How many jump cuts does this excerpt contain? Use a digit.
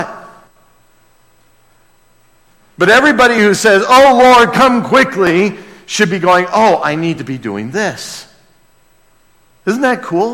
0